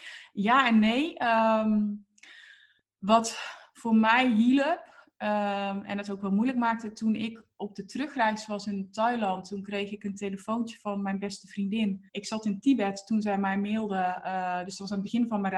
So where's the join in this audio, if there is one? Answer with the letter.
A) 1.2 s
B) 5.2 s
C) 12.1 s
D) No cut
C